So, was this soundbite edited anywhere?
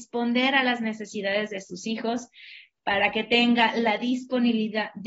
no; 0 cuts

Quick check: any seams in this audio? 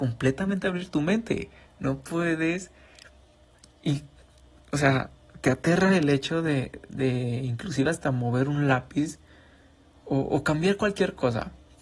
no; 0 cuts

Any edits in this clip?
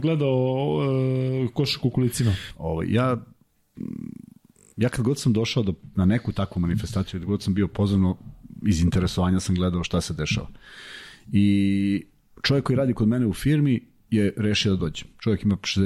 yes; 1 cut; at 2.5 s

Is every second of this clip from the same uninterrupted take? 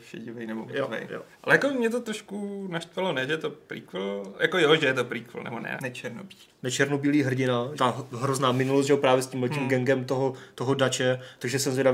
no; 3 cuts; at 1.3 s, 5.8 s, 7.8 s

